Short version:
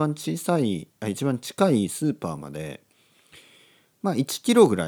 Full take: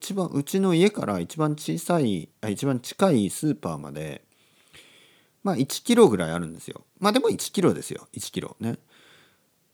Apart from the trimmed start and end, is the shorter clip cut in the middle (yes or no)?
no